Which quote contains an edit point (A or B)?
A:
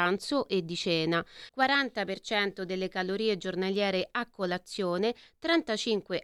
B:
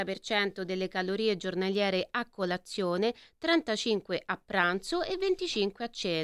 A